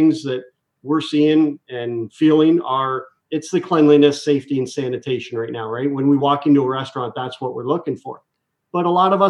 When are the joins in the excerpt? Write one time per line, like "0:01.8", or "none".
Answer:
none